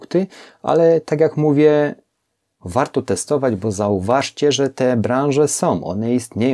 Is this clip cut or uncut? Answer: cut